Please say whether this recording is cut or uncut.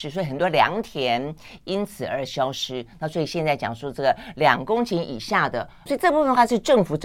cut